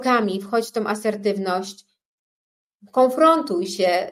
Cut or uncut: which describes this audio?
uncut